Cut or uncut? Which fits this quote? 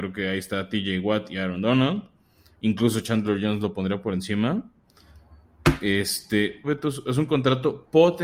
cut